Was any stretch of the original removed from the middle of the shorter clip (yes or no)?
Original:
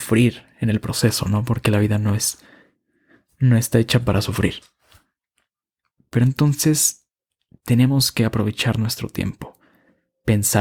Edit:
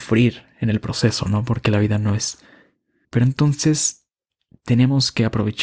yes